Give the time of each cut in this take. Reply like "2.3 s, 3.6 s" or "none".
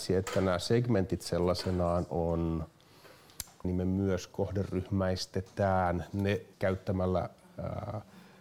3.6 s, 6.5 s